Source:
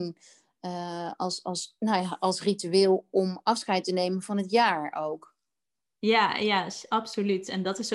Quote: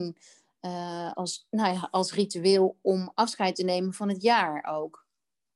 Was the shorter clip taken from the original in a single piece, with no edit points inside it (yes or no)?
no